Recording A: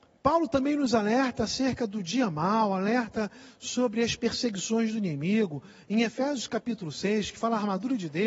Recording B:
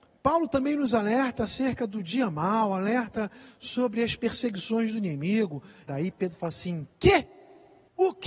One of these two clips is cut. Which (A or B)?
B